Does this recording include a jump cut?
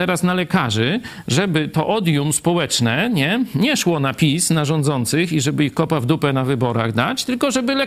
no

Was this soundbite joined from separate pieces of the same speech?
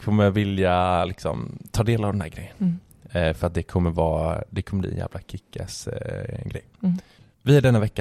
no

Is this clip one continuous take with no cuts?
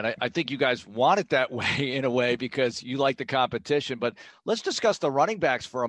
yes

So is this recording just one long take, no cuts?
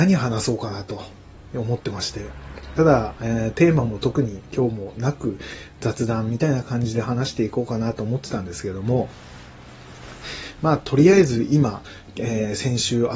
yes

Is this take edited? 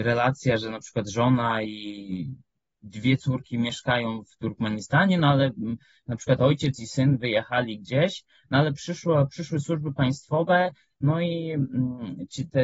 no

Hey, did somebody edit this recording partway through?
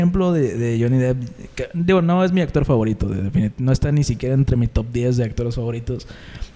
no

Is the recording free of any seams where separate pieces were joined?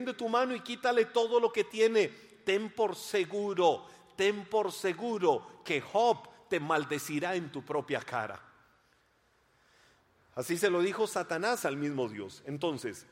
yes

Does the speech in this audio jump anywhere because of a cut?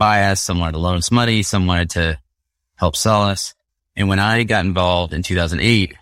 yes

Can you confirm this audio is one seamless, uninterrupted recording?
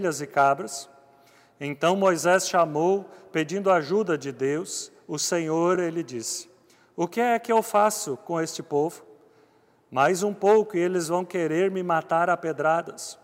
yes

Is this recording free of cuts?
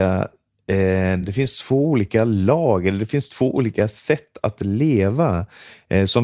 yes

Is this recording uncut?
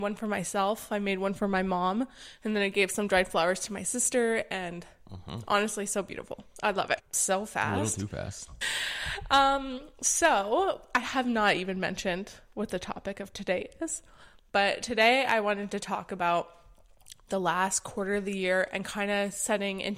no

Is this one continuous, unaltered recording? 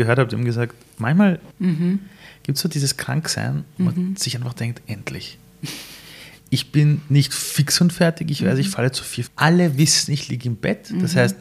no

